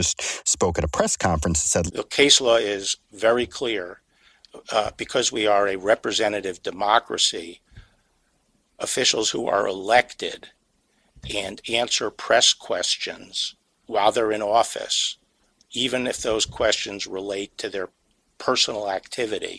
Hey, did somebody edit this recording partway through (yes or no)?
yes